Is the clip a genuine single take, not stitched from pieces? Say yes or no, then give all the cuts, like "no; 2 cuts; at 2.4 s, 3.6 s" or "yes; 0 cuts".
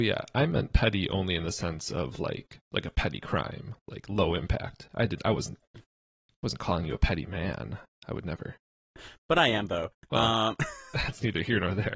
yes; 0 cuts